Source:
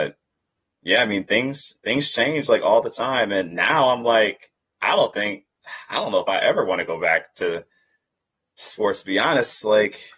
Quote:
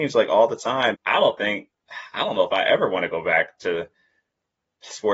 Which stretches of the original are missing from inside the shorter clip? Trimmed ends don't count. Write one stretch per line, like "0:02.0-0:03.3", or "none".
0:03.3-0:04.7